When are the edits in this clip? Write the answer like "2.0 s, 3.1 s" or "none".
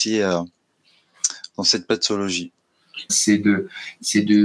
3.1 s